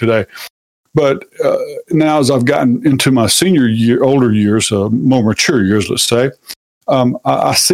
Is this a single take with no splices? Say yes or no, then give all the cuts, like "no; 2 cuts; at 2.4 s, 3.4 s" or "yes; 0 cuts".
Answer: yes; 0 cuts